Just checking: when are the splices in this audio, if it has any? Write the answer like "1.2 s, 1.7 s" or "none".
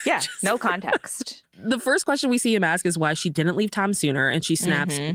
none